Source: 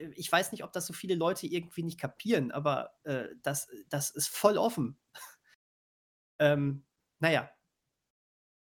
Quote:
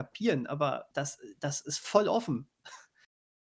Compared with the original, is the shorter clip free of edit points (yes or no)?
no